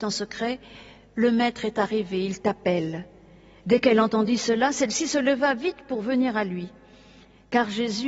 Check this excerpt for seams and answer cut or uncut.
uncut